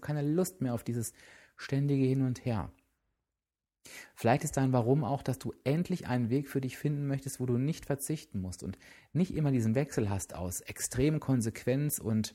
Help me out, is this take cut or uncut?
uncut